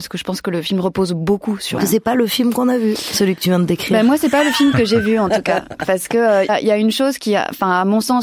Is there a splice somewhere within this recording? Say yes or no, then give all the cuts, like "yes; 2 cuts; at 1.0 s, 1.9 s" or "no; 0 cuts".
yes; 2 cuts; at 1.8 s, 6.5 s